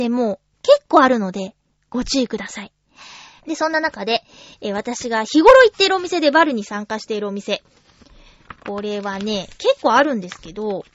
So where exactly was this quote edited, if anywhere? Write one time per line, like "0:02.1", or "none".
0:03.4